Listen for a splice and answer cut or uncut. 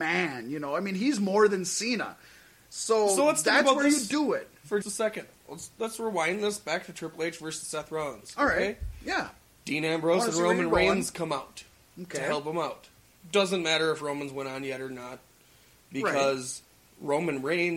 cut